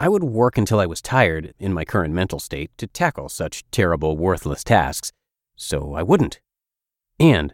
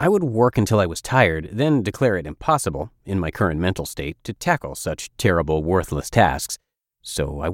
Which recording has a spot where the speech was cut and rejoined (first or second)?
first